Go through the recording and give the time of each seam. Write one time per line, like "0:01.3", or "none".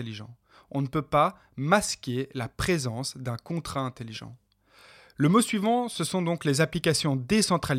none